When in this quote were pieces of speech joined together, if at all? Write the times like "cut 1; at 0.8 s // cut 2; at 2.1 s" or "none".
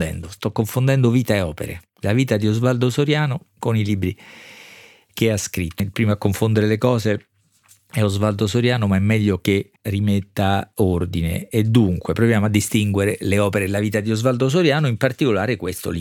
cut 1; at 5.8 s // cut 2; at 9.8 s